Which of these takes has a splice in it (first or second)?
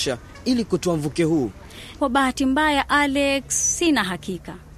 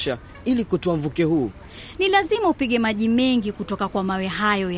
first